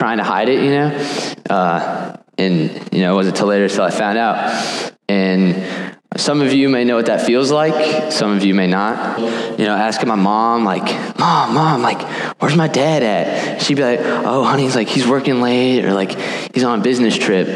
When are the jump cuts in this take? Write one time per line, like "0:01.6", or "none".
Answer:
0:05.0
0:09.2